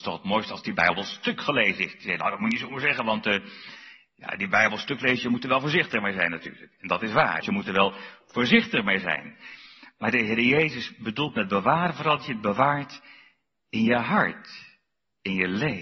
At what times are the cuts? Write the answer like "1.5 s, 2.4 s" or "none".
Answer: 7.4 s